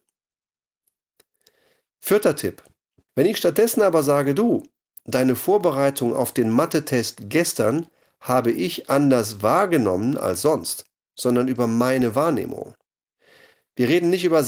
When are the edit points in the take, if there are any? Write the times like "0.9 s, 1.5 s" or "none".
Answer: 3.1 s, 11.1 s